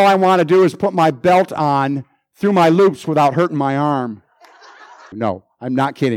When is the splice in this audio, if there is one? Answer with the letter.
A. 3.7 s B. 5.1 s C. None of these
B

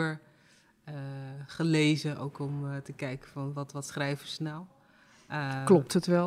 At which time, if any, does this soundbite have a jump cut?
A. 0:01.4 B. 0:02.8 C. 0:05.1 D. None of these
D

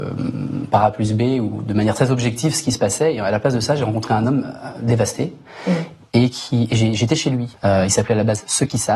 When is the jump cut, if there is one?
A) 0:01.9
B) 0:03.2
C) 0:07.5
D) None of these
C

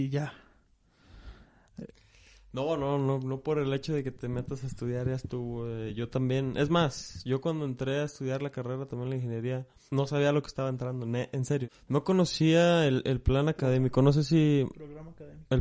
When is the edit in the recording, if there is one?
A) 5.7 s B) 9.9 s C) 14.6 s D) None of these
D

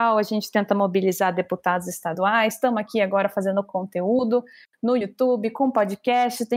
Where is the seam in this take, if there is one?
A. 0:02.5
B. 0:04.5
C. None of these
C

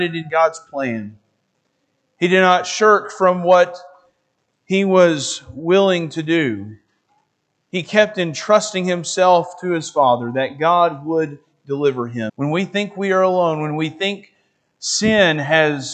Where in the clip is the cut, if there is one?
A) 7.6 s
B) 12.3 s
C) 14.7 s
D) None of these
B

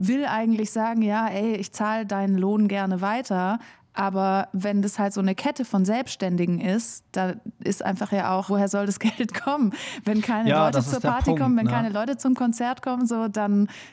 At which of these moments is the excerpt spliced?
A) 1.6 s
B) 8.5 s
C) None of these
B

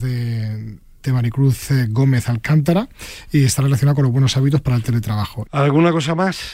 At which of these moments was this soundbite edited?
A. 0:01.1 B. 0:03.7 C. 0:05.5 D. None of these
C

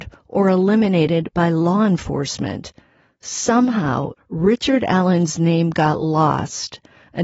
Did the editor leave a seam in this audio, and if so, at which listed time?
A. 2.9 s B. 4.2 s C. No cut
B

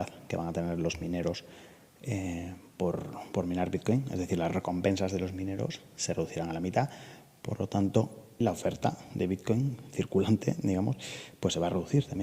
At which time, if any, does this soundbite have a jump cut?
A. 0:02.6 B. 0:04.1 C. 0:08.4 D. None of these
C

